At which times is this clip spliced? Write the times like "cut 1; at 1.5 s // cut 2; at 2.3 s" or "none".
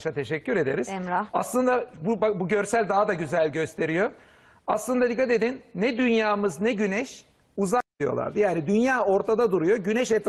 cut 1; at 1.3 s